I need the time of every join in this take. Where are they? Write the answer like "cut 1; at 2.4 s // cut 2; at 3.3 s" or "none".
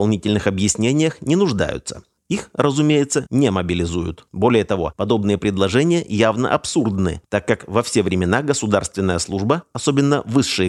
cut 1; at 2.2 s